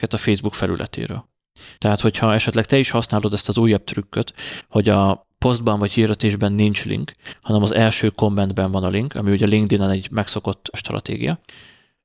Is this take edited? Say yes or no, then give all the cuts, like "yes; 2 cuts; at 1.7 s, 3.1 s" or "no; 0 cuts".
yes; 1 cut; at 1.8 s